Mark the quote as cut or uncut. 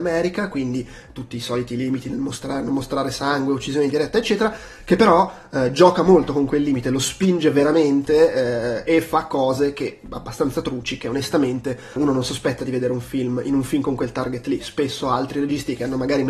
cut